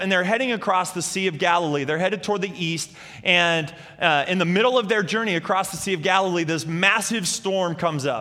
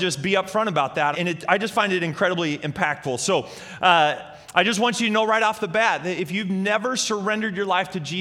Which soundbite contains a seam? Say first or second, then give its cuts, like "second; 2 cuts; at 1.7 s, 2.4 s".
second; 1 cut; at 1.1 s